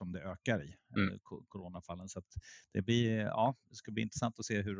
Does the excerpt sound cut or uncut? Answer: cut